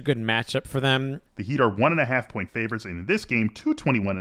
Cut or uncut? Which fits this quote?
cut